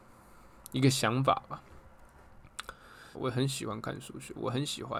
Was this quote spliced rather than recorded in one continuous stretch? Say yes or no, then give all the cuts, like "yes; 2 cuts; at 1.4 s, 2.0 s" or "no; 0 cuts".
yes; 1 cut; at 3.1 s